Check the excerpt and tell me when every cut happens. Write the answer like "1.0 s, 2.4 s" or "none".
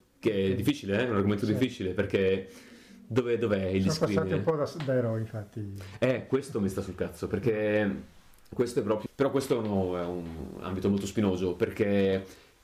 9.1 s